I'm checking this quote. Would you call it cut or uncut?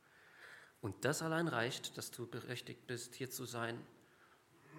uncut